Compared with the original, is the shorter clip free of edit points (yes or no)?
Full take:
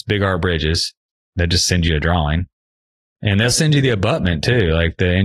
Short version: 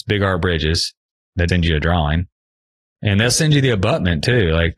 no